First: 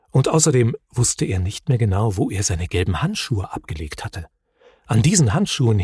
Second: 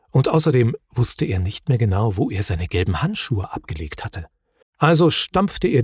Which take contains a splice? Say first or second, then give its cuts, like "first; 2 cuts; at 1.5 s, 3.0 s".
second; 1 cut; at 4.6 s